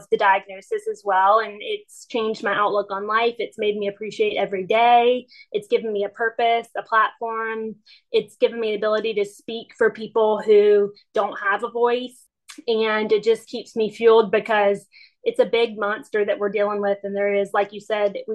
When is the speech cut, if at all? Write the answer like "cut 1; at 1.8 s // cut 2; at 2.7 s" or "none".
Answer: none